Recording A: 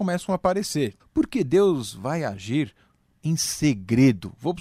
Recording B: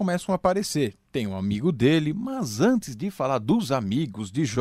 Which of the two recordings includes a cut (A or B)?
A